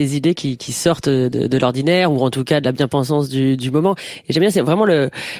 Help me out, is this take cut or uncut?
cut